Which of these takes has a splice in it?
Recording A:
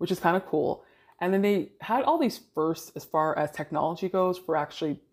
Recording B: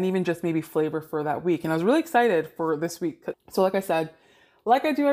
B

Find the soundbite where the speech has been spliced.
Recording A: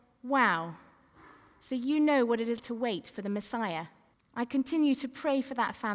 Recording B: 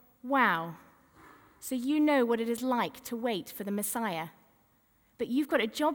A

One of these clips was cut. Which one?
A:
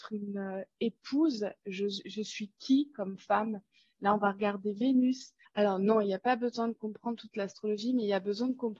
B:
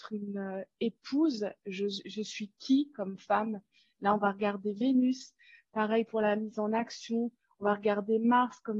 A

